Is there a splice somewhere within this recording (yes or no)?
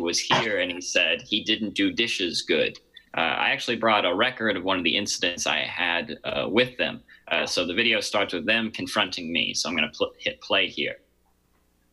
yes